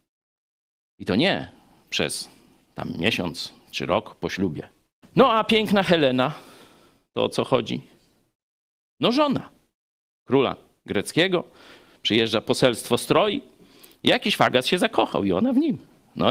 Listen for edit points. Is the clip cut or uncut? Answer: cut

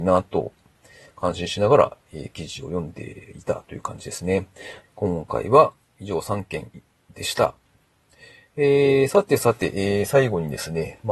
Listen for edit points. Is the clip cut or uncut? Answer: cut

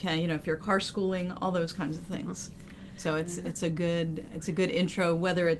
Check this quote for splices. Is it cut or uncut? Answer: uncut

